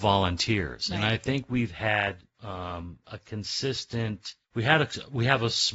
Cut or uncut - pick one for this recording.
cut